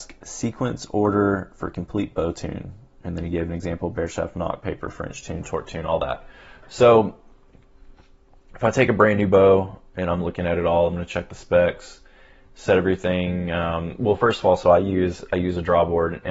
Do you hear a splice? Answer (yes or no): no